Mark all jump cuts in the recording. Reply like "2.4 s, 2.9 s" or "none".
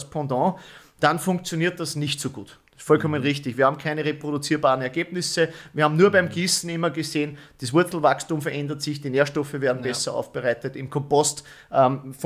none